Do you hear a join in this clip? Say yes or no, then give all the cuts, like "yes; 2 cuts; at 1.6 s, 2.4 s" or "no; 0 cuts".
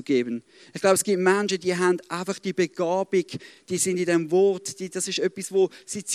no; 0 cuts